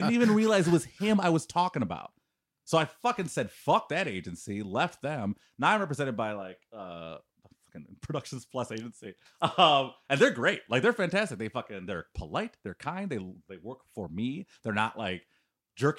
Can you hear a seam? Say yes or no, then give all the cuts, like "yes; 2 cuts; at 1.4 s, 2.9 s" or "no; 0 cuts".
no; 0 cuts